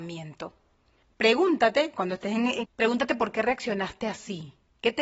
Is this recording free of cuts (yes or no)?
no